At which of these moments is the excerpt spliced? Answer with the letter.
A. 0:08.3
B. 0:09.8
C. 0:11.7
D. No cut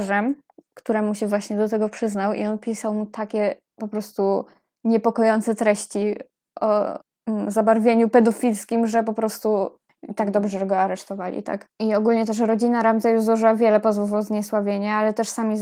C